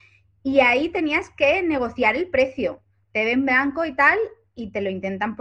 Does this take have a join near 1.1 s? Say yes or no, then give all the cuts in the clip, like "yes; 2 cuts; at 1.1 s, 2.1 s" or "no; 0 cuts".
no; 1 cut; at 3.0 s